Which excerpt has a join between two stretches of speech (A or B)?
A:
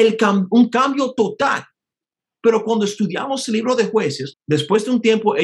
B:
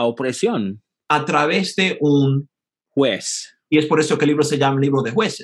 A